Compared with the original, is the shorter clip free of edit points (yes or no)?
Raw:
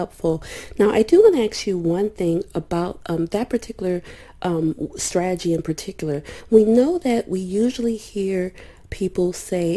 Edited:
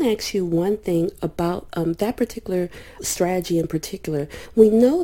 no